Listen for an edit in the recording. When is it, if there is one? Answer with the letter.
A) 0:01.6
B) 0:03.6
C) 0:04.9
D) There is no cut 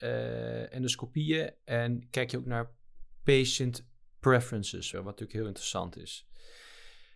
C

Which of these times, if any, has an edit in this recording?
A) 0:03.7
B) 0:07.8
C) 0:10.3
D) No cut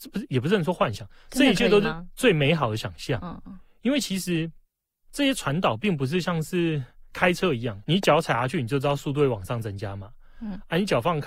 B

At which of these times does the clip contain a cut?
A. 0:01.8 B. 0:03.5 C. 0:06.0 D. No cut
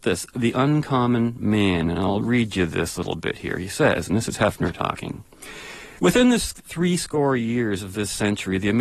C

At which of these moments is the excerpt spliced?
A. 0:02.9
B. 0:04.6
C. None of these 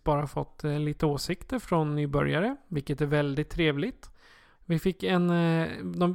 B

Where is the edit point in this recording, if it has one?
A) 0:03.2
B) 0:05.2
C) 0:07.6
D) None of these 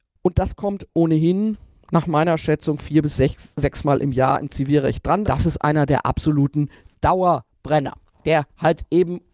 B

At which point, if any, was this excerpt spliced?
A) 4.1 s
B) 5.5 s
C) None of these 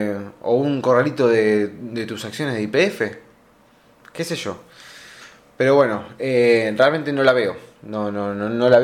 C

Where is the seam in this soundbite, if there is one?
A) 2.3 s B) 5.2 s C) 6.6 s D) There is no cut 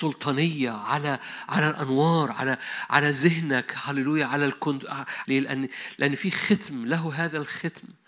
B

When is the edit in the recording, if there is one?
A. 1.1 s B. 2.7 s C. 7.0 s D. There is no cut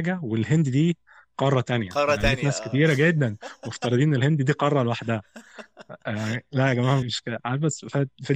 C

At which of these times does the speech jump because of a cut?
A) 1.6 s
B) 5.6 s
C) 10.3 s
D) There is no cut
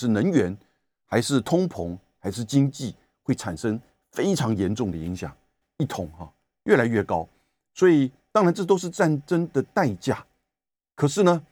B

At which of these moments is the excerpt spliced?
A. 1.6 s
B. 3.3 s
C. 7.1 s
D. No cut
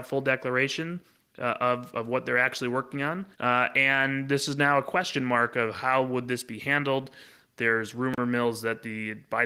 B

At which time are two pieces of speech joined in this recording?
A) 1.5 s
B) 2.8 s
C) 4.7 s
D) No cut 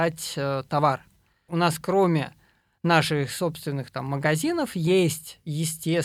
A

